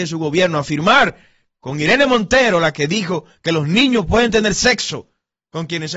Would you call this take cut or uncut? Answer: uncut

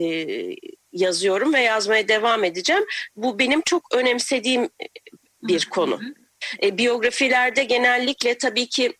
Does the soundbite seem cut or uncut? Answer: uncut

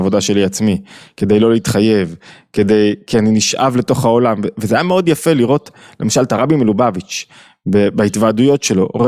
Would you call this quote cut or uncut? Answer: uncut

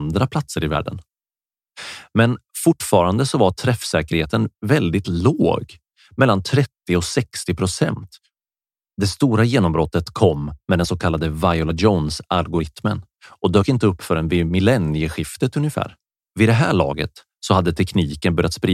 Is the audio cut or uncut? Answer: cut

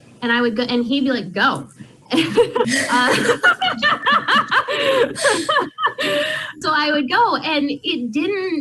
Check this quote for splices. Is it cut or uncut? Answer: cut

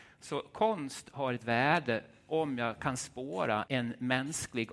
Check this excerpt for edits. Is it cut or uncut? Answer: cut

